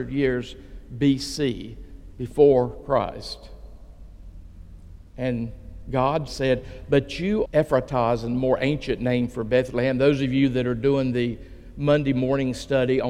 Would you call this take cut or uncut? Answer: cut